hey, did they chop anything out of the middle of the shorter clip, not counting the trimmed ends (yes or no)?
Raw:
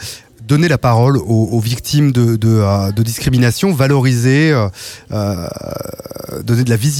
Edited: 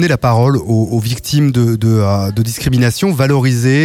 no